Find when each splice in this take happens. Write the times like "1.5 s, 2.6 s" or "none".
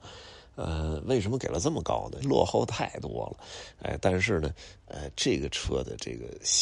2.2 s